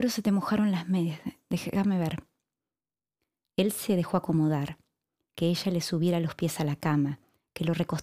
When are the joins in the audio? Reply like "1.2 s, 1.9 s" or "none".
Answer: none